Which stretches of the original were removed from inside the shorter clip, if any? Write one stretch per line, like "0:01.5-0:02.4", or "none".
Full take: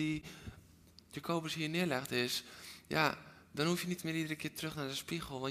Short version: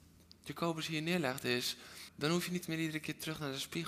0:02.8-0:03.4